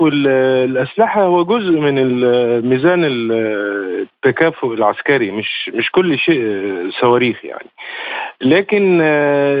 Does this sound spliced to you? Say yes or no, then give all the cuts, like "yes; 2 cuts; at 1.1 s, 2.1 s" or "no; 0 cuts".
no; 0 cuts